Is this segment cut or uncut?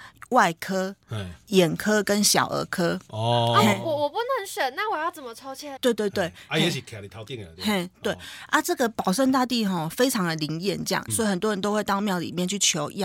cut